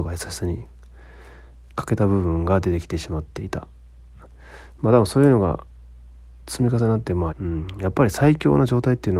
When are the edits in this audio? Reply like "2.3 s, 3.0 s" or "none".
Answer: 7.3 s